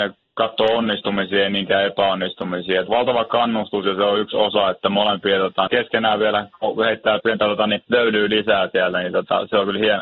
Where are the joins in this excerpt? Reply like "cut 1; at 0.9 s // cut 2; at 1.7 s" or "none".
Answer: cut 1; at 2.9 s // cut 2; at 5.7 s // cut 3; at 7.2 s